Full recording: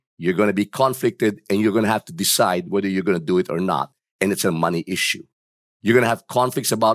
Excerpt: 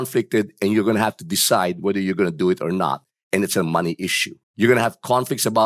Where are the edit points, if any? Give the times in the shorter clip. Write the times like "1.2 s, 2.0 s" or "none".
4.4 s